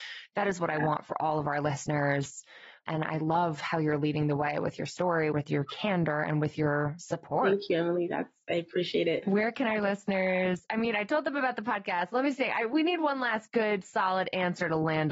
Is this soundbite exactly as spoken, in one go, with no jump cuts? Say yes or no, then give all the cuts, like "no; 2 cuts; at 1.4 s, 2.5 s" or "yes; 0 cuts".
yes; 0 cuts